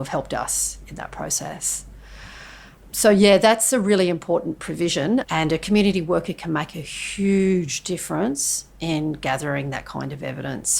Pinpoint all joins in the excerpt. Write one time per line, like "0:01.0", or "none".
0:05.2